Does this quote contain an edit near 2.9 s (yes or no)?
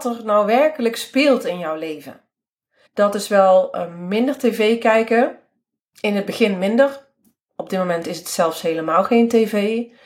yes